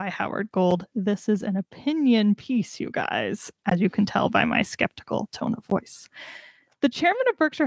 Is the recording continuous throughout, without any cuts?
yes; 0 cuts

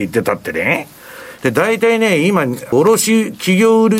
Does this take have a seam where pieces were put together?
yes; 2 cuts; at 1.4 s, 2.7 s

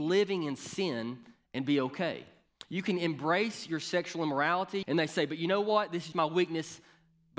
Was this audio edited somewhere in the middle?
yes; 2 cuts; at 4.8 s, 6.1 s

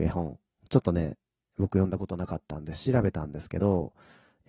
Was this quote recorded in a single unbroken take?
yes; 0 cuts

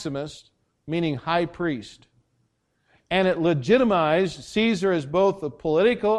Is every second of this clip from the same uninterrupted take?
yes; 0 cuts

